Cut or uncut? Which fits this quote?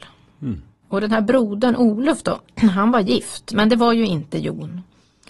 uncut